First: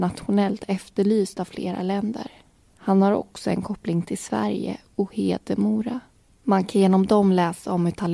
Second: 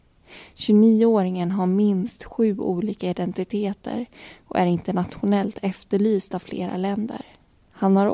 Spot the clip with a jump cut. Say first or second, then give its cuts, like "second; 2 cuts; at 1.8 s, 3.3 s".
first; 1 cut; at 6.3 s